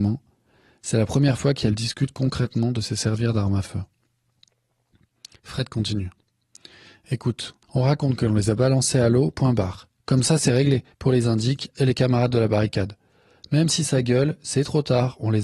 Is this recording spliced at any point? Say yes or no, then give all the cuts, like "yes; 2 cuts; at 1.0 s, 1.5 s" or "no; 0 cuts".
yes; 2 cuts; at 7.6 s, 10.9 s